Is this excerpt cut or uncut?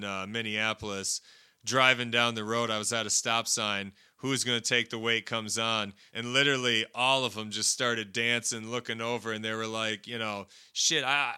cut